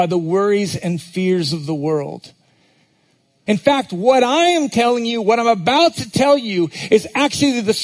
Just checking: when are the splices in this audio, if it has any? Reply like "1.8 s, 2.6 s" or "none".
3.5 s

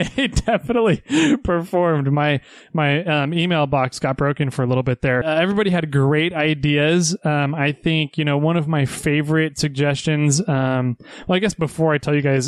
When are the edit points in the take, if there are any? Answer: 5.2 s

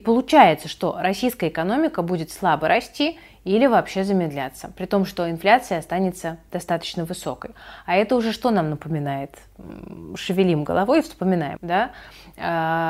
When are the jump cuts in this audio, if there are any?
11.6 s

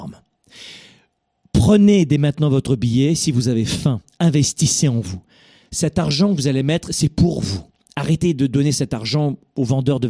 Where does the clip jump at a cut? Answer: none

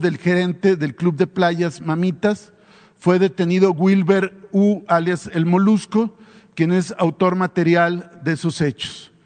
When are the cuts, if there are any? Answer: none

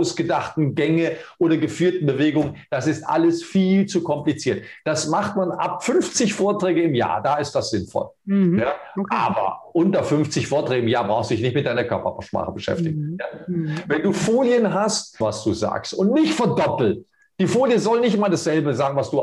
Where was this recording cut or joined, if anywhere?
15.2 s

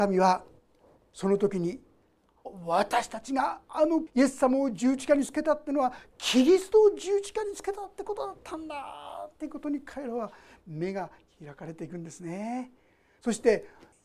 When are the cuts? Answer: 2.4 s

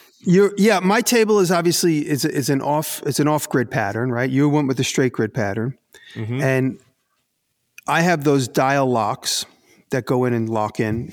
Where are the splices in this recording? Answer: none

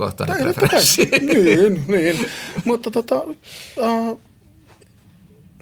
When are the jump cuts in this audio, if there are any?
none

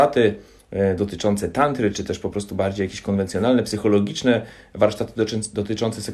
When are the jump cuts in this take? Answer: 1.9 s

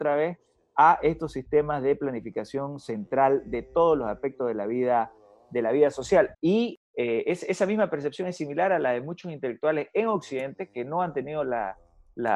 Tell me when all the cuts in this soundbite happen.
6.3 s

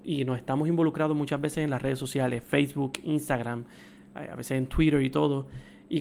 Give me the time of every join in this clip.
none

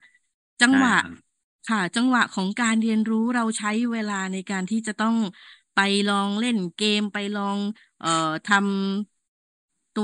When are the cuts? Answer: none

